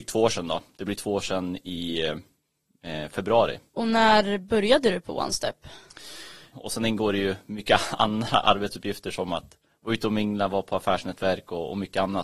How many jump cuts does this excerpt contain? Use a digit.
2